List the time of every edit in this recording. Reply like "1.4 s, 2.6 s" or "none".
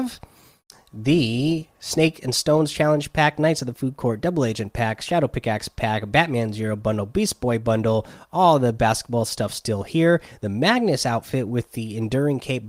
none